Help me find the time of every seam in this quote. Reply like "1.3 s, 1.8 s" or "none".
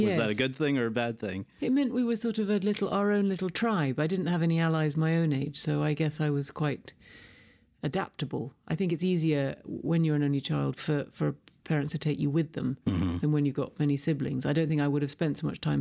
none